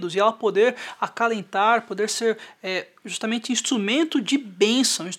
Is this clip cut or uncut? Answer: uncut